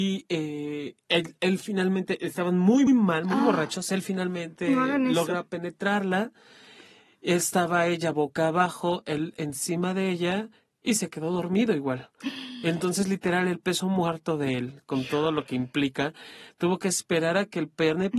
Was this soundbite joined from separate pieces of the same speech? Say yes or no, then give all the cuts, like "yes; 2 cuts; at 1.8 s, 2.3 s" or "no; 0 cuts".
yes; 1 cut; at 2.9 s